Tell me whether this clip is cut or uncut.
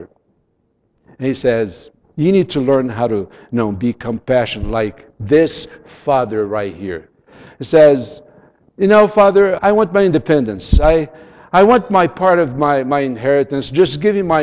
cut